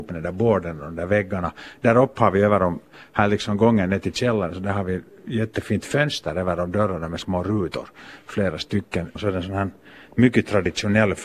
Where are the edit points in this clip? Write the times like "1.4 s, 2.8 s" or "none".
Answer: 7.2 s, 9.2 s